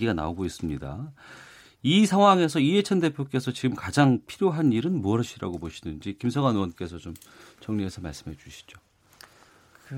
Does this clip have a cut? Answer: no; 0 cuts

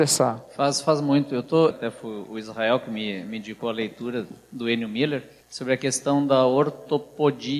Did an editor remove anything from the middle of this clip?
yes; 1 cut; at 1.7 s

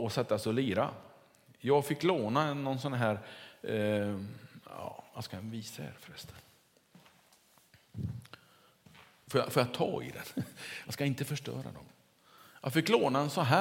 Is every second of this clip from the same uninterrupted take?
yes; 0 cuts

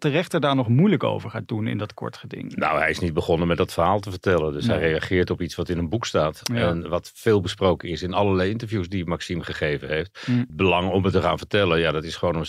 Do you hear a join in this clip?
no; 0 cuts

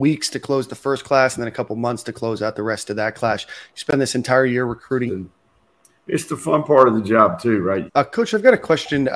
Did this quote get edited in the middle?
yes; 2 cuts; at 5.1 s, 7.9 s

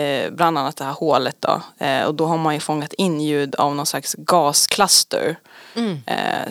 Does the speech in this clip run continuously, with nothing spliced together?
yes; 0 cuts

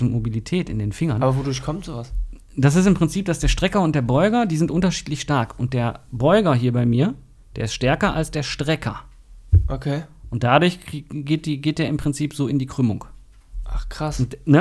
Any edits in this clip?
no; 0 cuts

